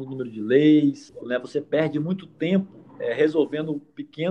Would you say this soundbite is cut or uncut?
cut